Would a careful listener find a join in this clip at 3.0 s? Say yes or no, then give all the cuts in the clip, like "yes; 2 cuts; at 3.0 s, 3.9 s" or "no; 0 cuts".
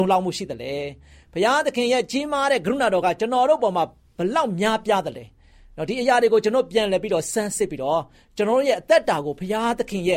no; 0 cuts